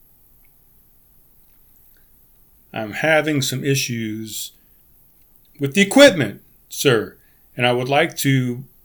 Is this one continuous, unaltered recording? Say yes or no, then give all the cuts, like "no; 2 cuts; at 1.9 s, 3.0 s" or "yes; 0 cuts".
yes; 0 cuts